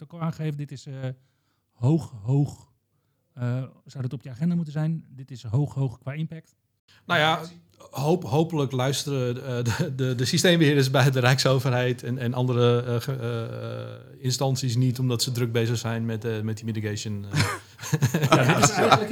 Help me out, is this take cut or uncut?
uncut